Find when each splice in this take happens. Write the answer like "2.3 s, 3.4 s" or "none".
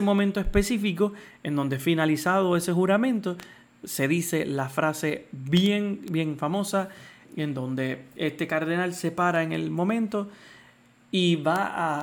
7.2 s